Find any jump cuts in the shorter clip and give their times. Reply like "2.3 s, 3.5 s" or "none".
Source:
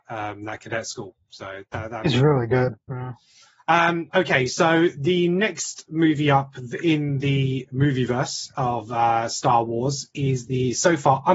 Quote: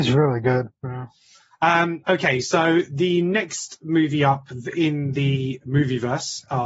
none